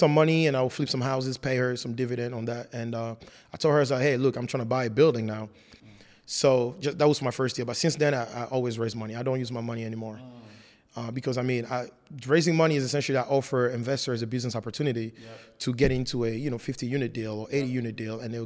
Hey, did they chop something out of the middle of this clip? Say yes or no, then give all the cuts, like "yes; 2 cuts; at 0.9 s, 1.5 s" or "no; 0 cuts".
yes; 1 cut; at 5.8 s